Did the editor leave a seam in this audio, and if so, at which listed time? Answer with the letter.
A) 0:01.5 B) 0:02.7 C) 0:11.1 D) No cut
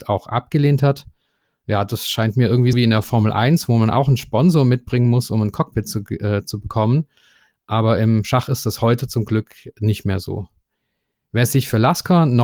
B